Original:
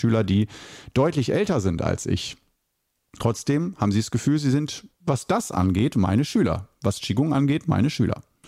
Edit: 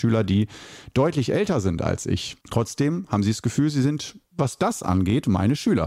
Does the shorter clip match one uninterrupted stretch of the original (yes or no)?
no